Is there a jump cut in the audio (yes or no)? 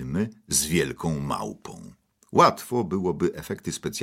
no